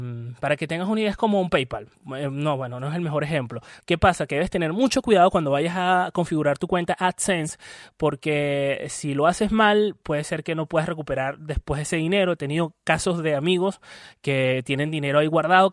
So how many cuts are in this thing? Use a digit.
1